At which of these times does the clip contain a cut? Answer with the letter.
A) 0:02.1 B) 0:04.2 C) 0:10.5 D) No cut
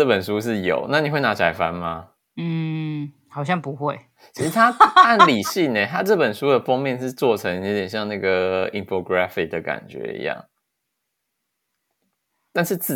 D